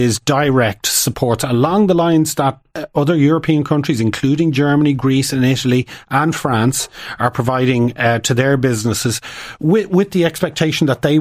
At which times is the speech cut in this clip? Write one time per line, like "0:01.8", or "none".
none